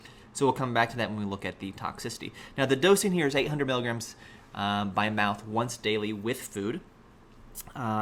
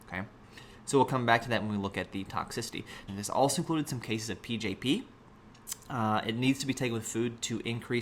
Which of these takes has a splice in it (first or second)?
second